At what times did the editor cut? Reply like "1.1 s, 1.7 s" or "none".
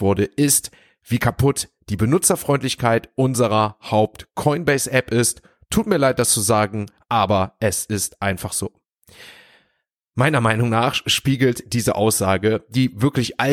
none